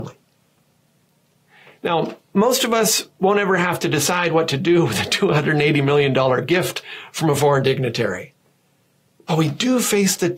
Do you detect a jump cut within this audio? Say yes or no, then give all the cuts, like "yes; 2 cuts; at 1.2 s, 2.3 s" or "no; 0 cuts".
no; 0 cuts